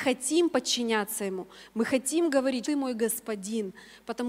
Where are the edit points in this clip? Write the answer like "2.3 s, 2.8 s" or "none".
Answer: 2.6 s